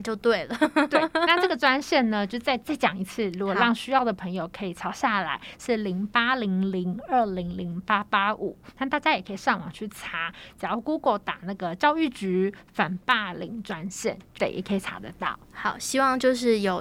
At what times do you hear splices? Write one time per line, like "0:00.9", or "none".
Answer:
0:14.4